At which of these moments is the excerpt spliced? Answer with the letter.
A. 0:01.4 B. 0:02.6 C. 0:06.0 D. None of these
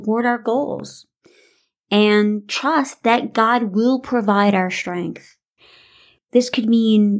D